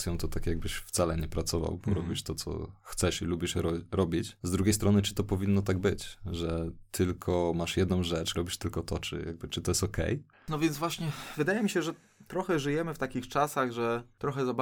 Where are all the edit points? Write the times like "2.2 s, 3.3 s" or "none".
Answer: 8.3 s